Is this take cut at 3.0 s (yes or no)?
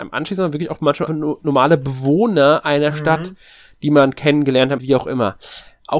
no